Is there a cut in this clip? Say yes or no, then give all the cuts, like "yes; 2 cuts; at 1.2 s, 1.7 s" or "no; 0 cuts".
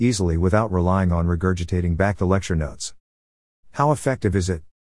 no; 0 cuts